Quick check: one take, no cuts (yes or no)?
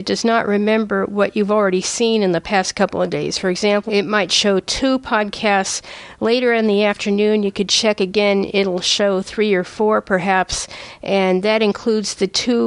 no